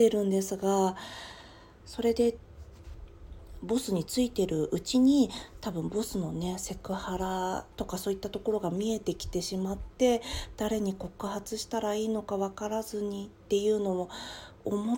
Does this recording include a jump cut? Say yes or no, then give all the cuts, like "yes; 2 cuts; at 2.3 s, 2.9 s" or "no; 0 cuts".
yes; 2 cuts; at 1.8 s, 7.7 s